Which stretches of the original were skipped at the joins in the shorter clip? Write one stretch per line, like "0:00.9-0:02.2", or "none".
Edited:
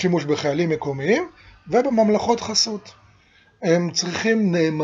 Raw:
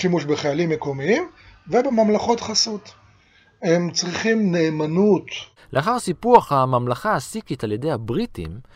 none

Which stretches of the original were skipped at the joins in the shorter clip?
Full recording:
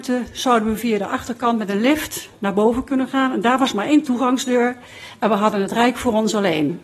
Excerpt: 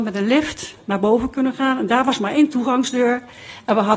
none

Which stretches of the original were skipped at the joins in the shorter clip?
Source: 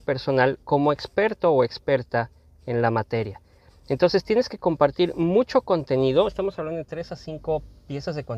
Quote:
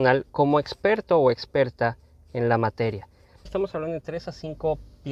0:03.8-0:06.3

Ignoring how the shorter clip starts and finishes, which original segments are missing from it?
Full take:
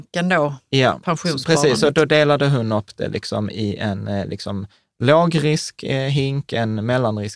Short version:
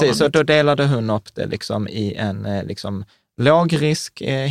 none

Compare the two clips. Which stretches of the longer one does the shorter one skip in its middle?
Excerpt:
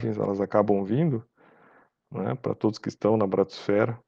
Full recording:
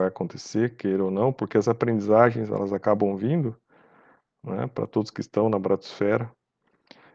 none

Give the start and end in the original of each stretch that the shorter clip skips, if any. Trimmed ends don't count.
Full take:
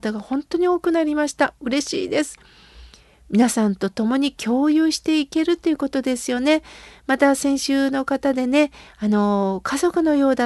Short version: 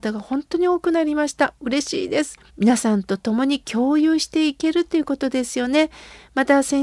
0:02.5-0:03.2

